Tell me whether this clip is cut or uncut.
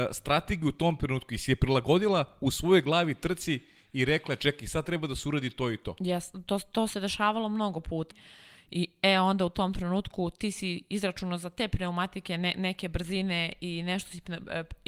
cut